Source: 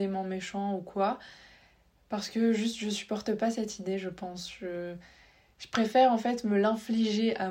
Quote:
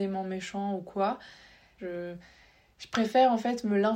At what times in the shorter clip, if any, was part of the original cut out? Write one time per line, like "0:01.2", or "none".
0:01.8